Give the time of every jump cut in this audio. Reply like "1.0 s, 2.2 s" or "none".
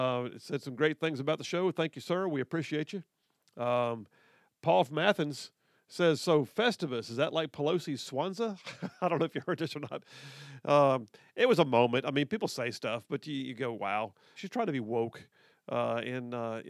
14.4 s